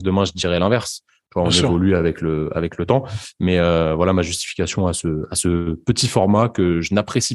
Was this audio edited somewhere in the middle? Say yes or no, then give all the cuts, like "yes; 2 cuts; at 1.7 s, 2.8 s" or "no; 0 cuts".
no; 0 cuts